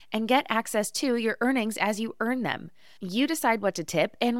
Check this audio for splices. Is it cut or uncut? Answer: uncut